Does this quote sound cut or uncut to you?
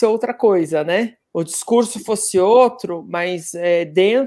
cut